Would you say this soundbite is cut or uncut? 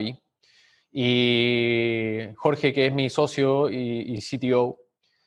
uncut